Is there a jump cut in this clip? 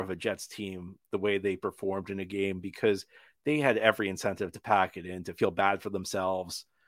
no; 0 cuts

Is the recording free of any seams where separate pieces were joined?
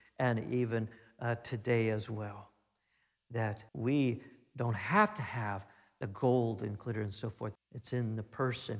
no; 2 cuts; at 3.7 s, 7.6 s

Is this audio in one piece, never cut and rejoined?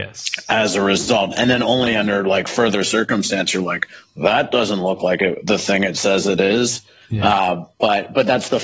yes; 0 cuts

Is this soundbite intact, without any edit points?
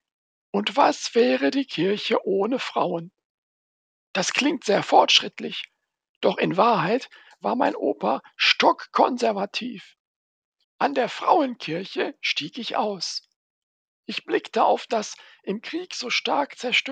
no; 1 cut; at 10.6 s

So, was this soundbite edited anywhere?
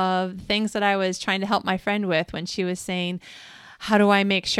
no; 0 cuts

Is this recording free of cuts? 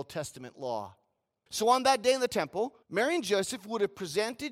no; 2 cuts; at 1.5 s, 2.8 s

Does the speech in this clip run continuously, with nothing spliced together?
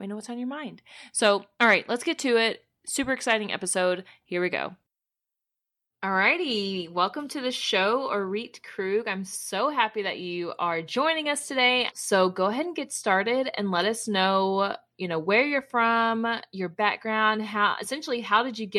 no; 1 cut; at 11.9 s

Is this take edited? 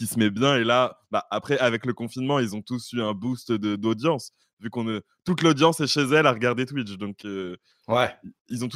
no; 0 cuts

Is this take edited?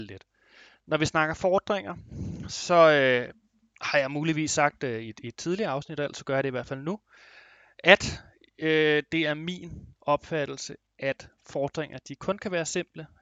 no; 0 cuts

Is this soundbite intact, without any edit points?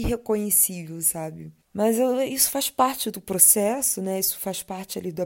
no; 1 cut; at 1.6 s

